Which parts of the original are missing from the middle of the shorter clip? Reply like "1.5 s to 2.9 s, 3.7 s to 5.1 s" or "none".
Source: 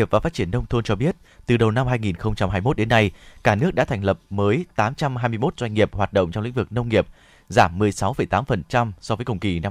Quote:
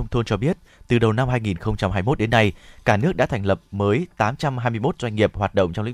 none